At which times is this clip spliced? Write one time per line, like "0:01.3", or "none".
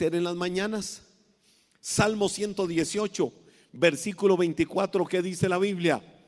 none